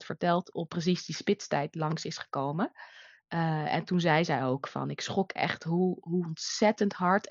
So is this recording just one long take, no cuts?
yes; 0 cuts

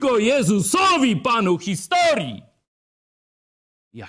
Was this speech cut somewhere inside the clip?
no; 0 cuts

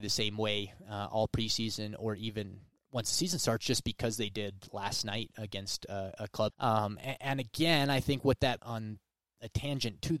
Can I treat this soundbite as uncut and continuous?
no; 2 cuts; at 6.5 s, 8.6 s

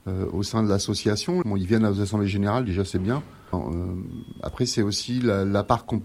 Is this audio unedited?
no; 2 cuts; at 1.4 s, 3.5 s

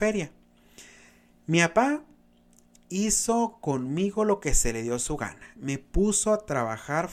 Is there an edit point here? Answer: no; 0 cuts

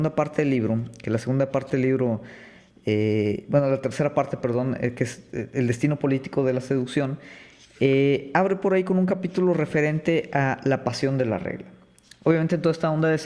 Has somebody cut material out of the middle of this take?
no; 0 cuts

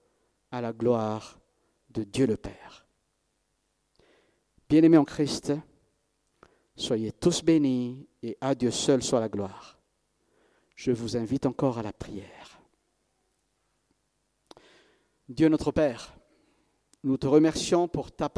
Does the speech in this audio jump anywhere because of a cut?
no; 0 cuts

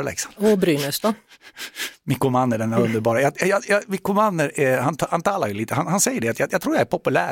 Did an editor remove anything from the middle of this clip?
no; 0 cuts

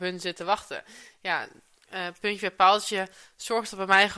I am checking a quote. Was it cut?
no; 0 cuts

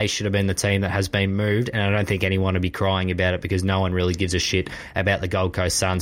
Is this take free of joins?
yes; 0 cuts

